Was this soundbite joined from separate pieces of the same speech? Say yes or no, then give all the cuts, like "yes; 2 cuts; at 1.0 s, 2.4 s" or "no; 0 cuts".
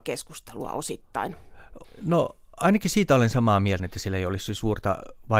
yes; 2 cuts; at 1.8 s, 3.8 s